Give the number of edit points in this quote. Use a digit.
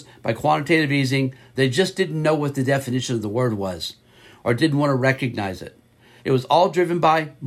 2